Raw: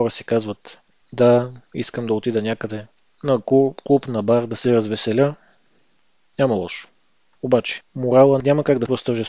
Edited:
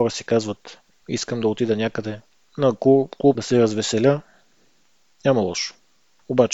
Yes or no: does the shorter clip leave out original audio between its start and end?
yes